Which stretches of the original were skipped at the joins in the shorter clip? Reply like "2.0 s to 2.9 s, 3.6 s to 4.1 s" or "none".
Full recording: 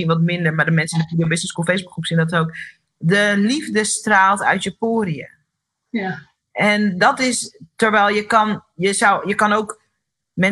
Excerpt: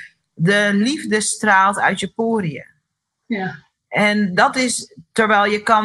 none